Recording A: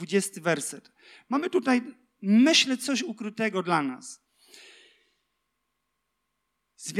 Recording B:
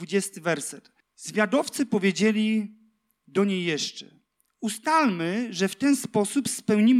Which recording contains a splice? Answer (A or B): B